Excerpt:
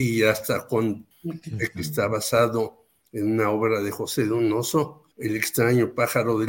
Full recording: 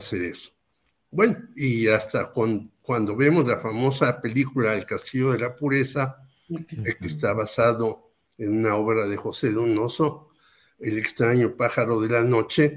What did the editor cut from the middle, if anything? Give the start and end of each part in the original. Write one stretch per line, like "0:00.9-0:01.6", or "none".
0:02.8-0:06.4
0:10.4-0:10.7